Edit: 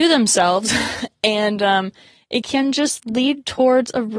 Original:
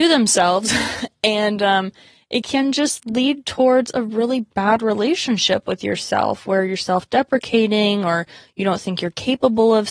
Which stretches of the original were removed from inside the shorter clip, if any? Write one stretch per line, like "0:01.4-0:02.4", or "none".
none